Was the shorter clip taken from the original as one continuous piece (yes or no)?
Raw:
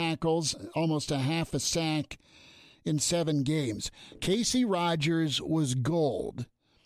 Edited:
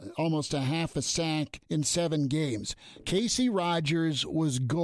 no